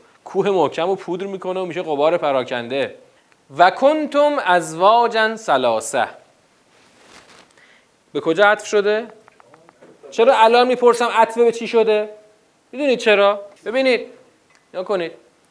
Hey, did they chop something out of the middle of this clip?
yes; 2 cuts; at 10.0 s, 13.6 s

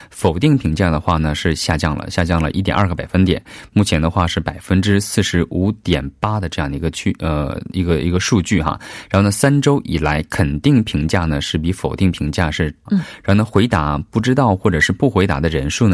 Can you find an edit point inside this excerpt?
yes; 1 cut; at 12.9 s

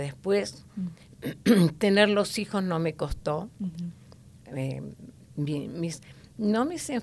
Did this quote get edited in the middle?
yes; 1 cut; at 4.4 s

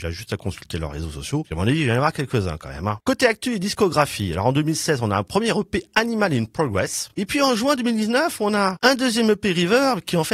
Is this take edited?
no; 0 cuts

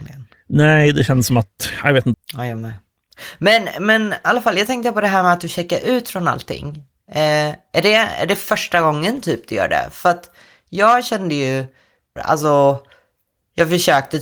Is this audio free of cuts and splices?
no; 2 cuts; at 2.1 s, 12.2 s

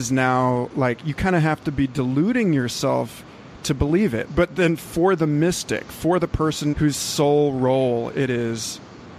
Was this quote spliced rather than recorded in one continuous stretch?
yes; 2 cuts; at 4.3 s, 6.7 s

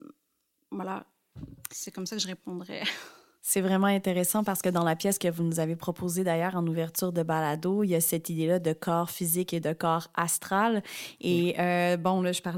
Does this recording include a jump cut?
no; 0 cuts

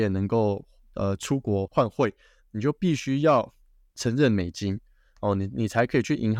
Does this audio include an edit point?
yes; 1 cut; at 1.7 s

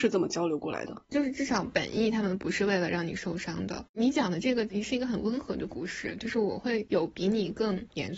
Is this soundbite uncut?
no; 1 cut; at 1.0 s

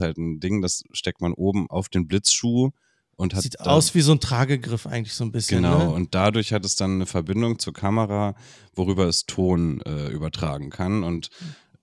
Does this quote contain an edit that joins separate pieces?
no; 0 cuts

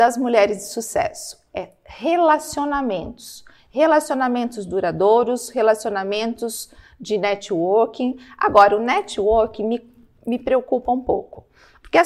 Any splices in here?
no; 0 cuts

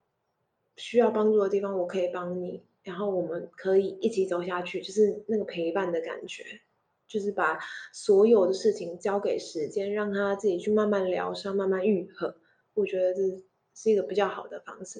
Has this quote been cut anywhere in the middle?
no; 0 cuts

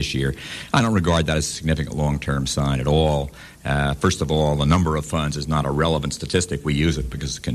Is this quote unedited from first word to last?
yes; 0 cuts

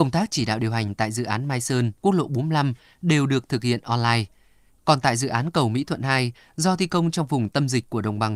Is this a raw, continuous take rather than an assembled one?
no; 1 cut; at 4.7 s

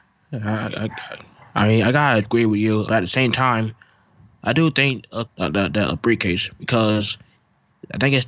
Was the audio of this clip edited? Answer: yes; 2 cuts; at 2.9 s, 5.3 s

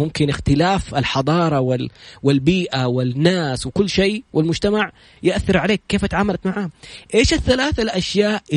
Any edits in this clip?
no; 0 cuts

